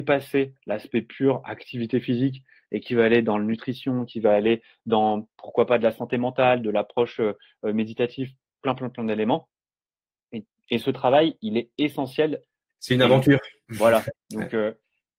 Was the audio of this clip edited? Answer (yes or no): yes